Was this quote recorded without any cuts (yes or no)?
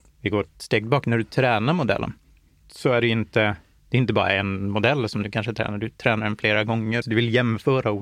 no